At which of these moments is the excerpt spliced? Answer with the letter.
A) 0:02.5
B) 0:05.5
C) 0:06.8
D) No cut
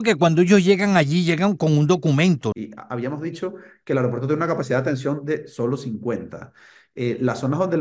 A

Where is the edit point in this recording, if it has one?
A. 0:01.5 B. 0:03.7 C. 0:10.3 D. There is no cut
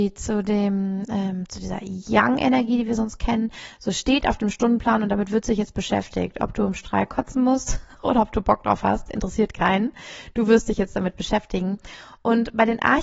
D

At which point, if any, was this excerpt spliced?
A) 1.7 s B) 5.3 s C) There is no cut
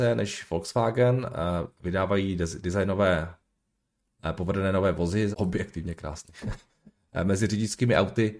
B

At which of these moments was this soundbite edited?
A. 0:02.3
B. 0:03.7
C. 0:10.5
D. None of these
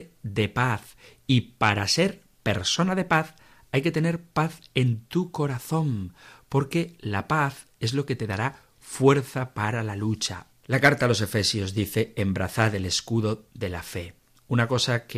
C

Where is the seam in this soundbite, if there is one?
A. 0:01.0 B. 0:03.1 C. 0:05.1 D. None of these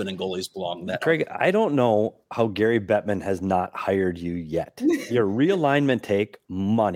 C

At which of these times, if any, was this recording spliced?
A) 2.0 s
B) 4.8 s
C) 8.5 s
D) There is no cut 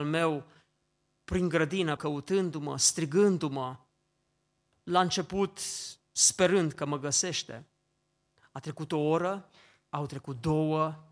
A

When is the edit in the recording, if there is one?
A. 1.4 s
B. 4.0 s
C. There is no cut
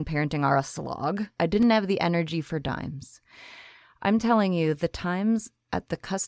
A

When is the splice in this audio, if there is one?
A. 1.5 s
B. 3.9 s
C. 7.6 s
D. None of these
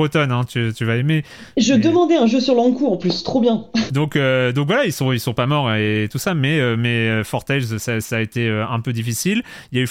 B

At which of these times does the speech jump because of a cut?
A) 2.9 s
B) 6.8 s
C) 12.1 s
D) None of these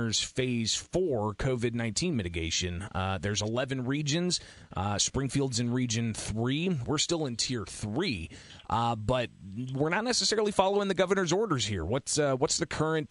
B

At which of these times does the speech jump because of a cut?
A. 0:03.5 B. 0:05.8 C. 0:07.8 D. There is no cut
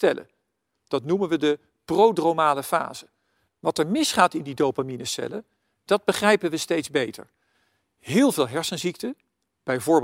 A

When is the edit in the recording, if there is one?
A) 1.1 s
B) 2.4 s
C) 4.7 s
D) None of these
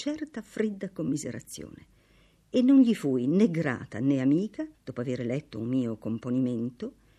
C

